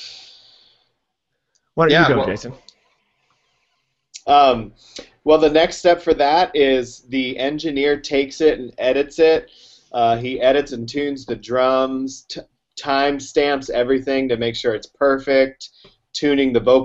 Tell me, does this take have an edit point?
no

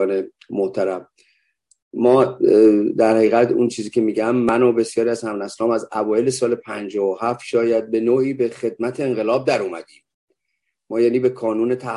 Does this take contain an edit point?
no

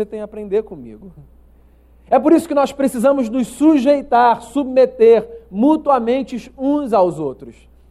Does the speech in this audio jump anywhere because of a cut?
no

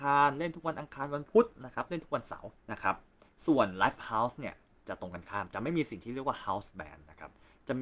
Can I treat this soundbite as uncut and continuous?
no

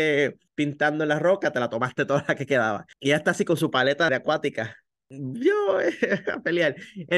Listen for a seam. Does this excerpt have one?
yes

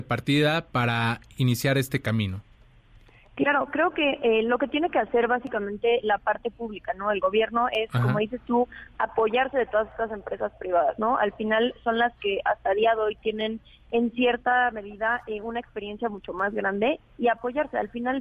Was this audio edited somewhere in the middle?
no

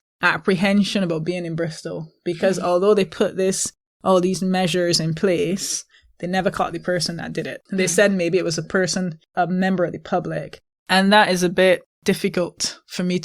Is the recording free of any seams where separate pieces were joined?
yes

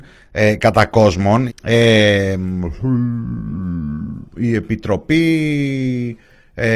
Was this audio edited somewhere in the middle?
yes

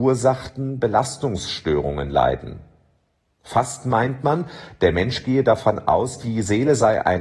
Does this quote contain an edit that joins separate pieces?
no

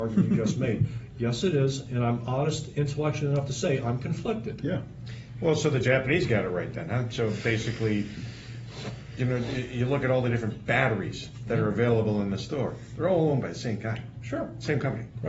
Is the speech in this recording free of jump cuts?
yes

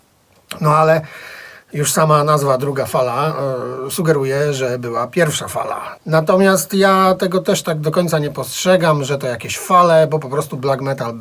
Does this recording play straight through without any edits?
no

